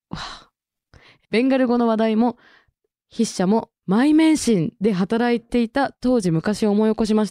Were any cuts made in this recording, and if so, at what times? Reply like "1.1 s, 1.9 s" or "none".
3.0 s

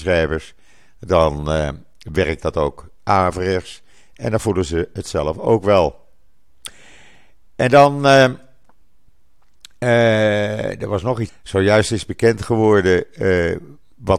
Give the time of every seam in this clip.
11.3 s

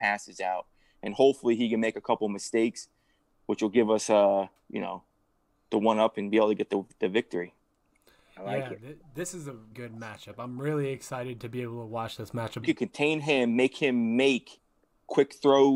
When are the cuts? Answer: 9.7 s, 12.6 s

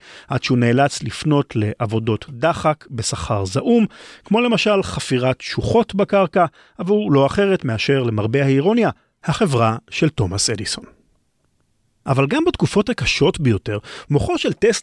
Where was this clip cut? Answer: none

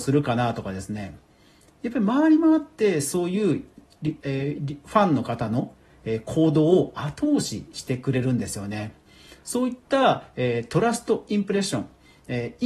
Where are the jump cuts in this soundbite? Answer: none

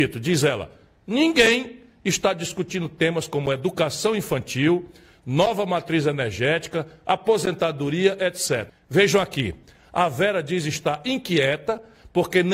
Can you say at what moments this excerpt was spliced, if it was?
8.7 s

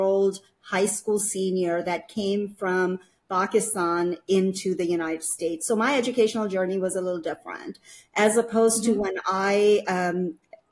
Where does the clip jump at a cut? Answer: none

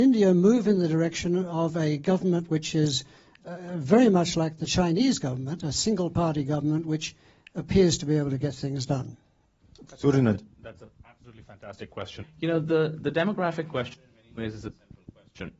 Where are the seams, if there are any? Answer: 12.2 s

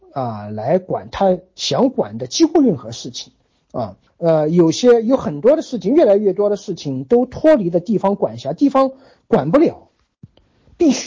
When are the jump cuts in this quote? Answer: 4.1 s

